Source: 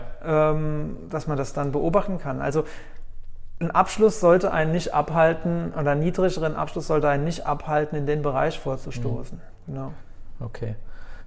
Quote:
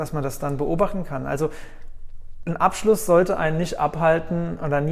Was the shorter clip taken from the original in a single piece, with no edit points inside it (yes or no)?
yes